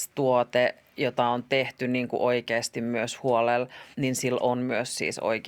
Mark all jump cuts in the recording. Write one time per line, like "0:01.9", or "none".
0:03.9